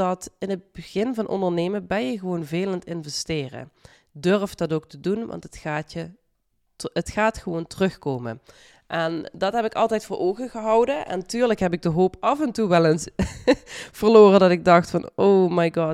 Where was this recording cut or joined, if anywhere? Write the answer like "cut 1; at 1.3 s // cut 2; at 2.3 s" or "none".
none